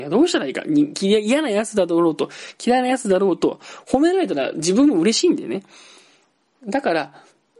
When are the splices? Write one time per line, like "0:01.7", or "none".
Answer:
none